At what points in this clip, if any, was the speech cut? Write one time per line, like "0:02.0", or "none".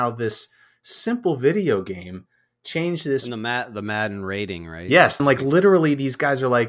0:05.2